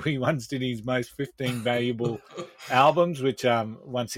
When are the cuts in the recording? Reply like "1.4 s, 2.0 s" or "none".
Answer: none